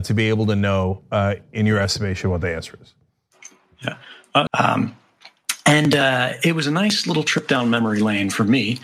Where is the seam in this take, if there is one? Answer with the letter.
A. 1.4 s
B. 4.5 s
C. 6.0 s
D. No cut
B